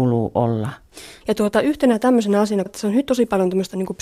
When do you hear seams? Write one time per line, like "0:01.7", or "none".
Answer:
0:01.2
0:02.7